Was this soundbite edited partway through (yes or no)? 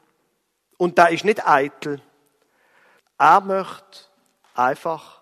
yes